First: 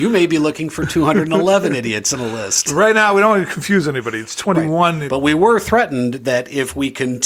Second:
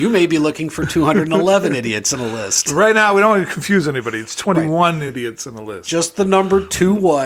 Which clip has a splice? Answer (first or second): first